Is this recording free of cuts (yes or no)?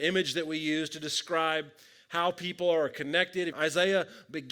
no